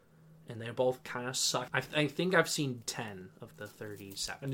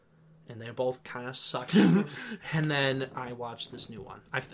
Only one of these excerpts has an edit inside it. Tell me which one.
first; 2 cuts; at 1.7 s, 3.5 s

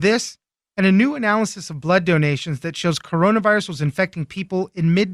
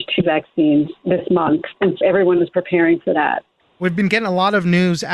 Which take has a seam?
second; 2 cuts; at 2.0 s, 3.6 s

